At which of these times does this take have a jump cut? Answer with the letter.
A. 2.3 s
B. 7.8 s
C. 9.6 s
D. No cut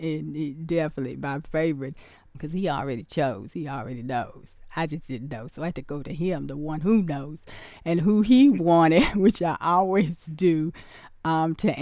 A